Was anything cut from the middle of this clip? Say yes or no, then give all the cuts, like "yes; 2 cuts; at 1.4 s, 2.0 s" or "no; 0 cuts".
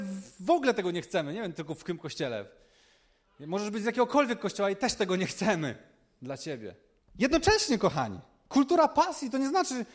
yes; 1 cut; at 7.0 s